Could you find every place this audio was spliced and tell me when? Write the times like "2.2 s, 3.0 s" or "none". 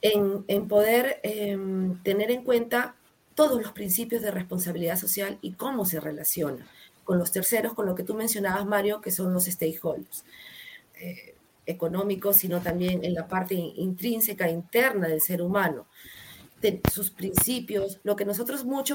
10.9 s, 16.5 s, 18.0 s